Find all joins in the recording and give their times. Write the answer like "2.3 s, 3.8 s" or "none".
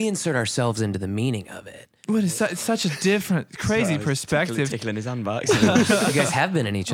none

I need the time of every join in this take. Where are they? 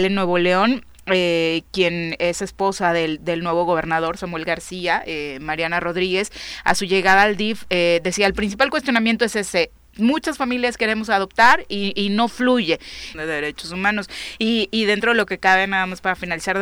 13.1 s

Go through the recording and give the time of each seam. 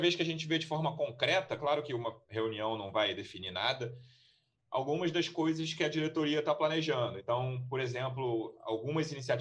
none

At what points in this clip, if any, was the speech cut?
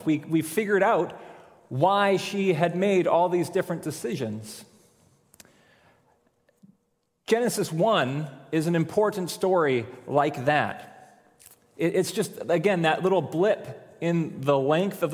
none

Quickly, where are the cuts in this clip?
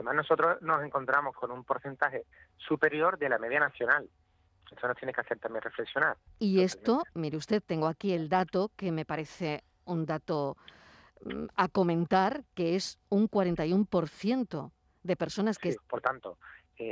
6.3 s, 15.8 s

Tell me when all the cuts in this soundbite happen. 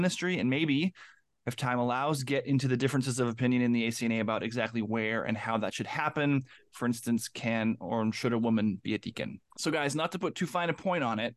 9.5 s

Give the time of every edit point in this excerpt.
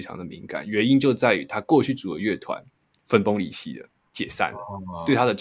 none

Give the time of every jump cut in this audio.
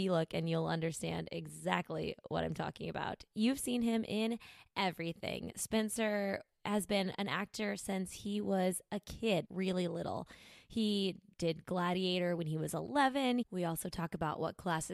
9.4 s, 13.4 s

